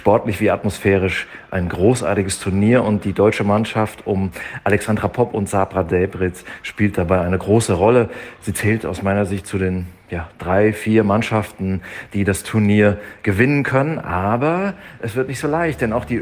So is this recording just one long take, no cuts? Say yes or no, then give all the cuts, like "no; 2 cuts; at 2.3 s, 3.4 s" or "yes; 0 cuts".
yes; 0 cuts